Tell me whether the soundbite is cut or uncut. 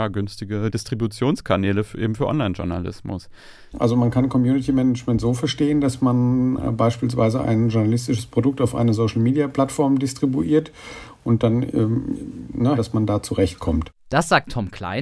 cut